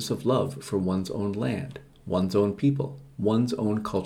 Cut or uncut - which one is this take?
uncut